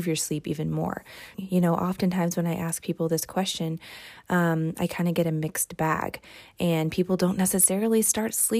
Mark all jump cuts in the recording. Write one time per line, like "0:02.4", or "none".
0:01.3